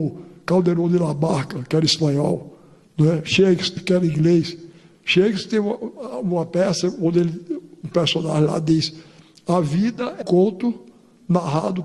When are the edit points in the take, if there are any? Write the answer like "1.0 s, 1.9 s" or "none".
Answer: 10.2 s